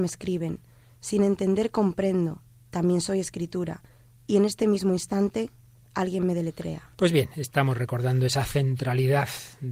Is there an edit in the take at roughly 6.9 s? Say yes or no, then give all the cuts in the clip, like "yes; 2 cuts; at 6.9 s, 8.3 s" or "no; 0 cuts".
yes; 1 cut; at 6.9 s